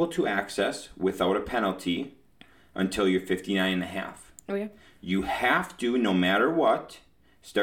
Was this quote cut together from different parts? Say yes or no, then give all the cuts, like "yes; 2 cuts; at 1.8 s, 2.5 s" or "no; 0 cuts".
no; 0 cuts